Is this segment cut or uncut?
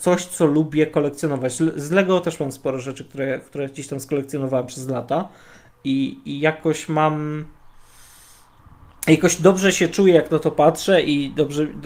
uncut